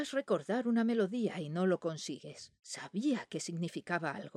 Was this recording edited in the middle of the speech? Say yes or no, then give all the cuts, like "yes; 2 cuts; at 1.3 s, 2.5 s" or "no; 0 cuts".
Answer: yes; 1 cut; at 2.6 s